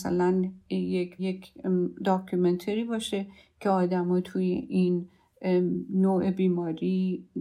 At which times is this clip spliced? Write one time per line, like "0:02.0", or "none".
0:01.2